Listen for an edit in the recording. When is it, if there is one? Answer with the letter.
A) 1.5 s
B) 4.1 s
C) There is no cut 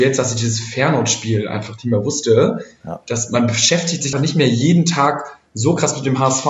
B